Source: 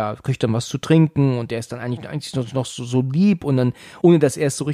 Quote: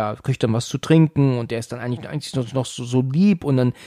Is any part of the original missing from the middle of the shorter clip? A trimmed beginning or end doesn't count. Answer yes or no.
no